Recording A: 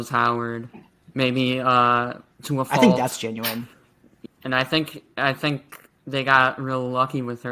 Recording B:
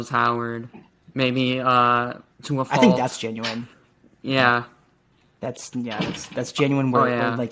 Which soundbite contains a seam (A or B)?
A